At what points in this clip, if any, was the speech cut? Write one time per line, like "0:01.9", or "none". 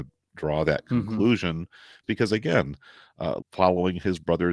0:02.0
0:03.4